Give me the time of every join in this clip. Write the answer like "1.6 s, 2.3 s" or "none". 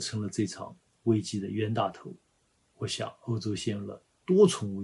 none